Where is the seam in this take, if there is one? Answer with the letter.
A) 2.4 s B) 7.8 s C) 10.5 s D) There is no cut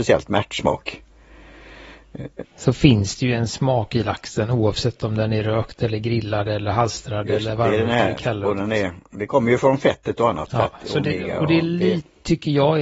A